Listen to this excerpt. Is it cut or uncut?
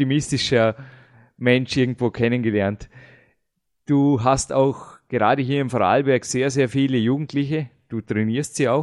uncut